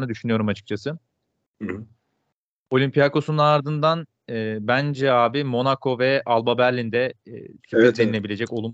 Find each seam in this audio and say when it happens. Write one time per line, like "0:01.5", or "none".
none